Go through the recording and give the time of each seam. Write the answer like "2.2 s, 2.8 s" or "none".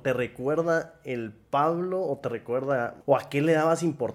3.0 s